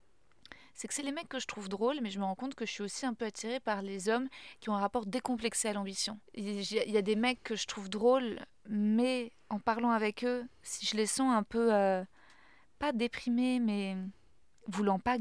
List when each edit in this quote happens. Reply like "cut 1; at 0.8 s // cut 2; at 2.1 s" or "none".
cut 1; at 6.3 s